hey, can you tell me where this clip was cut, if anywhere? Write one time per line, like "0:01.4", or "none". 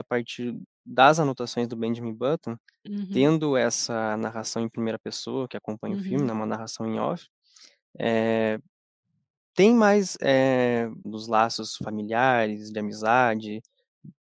0:11.0